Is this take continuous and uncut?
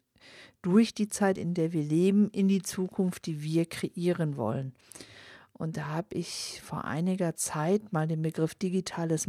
yes; 0 cuts

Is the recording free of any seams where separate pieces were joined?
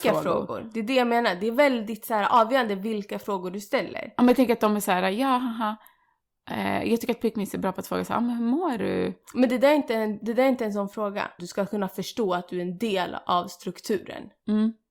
no; 1 cut; at 11.4 s

